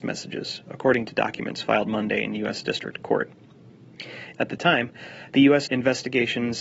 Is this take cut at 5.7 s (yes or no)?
yes